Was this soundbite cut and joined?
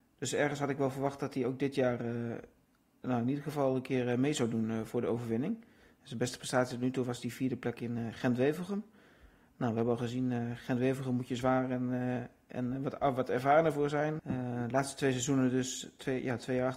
yes; 1 cut; at 14.2 s

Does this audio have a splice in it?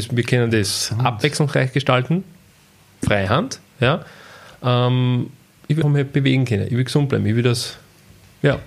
yes; 1 cut; at 5.8 s

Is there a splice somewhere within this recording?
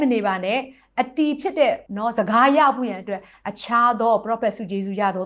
yes; 1 cut; at 1.9 s

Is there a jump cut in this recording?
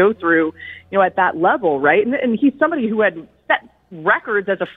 no; 0 cuts

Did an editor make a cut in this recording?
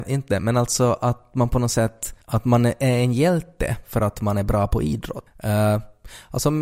yes; 2 cuts; at 2.2 s, 5.3 s

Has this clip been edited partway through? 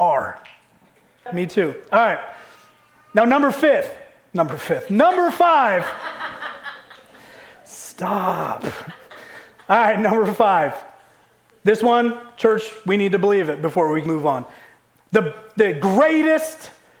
yes; 2 cuts; at 1.3 s, 14.1 s

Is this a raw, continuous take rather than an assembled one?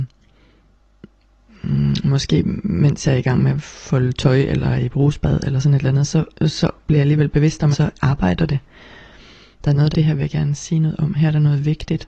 no; 3 cuts; at 6.3 s, 7.7 s, 9.9 s

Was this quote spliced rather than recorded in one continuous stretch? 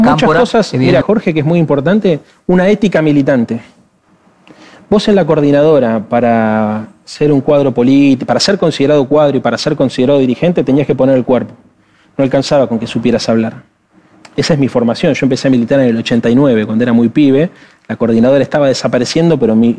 yes; 1 cut; at 1.0 s

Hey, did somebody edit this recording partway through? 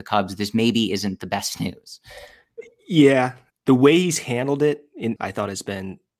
yes; 2 cuts; at 3.5 s, 5.2 s

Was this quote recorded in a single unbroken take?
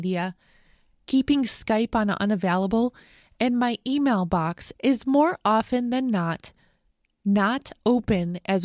yes; 0 cuts

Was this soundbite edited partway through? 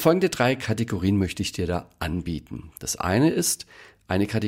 no; 0 cuts

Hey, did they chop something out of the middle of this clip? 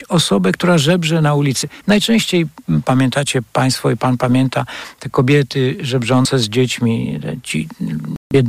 yes; 1 cut; at 1.8 s

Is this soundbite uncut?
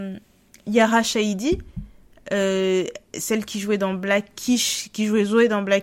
yes; 0 cuts

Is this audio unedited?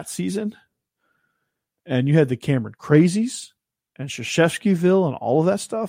yes; 0 cuts

